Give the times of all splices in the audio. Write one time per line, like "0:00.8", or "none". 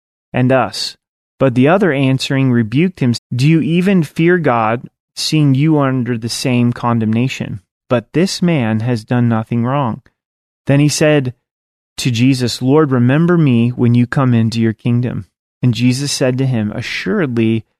0:03.1
0:07.8